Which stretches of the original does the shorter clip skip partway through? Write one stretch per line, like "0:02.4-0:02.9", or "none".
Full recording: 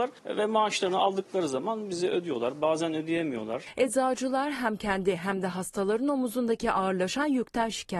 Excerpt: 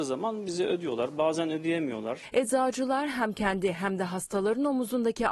none